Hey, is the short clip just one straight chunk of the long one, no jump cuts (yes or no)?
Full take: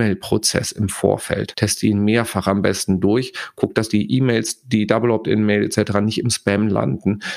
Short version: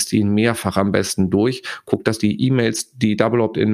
yes